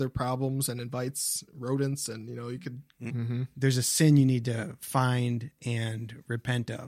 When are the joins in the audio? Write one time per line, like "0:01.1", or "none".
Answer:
0:03.1